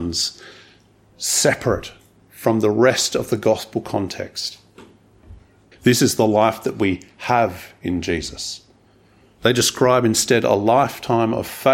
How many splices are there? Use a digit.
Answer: 2